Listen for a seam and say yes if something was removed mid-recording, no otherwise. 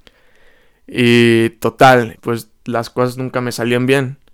yes